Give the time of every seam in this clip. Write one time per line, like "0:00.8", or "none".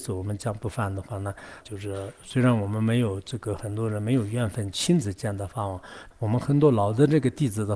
0:01.6
0:06.1